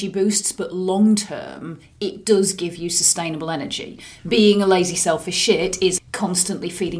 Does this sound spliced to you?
yes; 1 cut; at 6.0 s

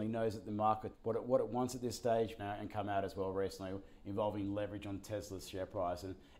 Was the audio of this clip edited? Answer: yes; 2 cuts; at 0.9 s, 2.4 s

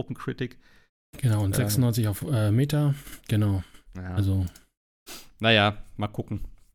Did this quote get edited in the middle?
no; 0 cuts

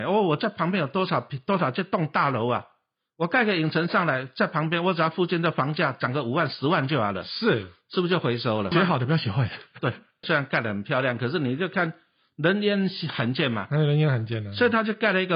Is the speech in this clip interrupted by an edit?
yes; 2 cuts; at 8.7 s, 10.2 s

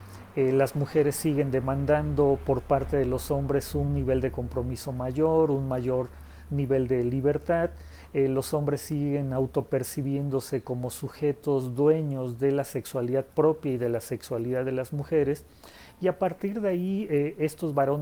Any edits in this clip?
no; 0 cuts

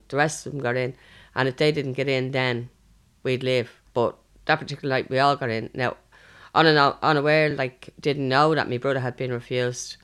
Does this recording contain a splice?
no; 0 cuts

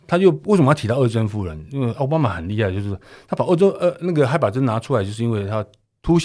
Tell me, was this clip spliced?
no; 0 cuts

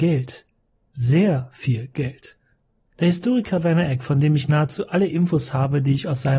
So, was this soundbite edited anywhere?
no; 0 cuts

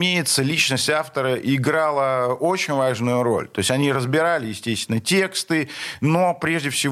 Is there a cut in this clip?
no; 0 cuts

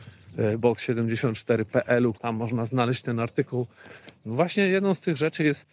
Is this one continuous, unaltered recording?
no; 2 cuts; at 2.1 s, 4.2 s

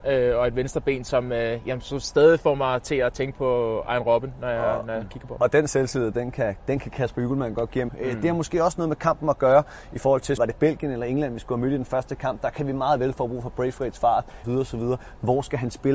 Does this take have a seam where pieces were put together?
yes; 3 cuts; at 7.9 s, 10.4 s, 14.4 s

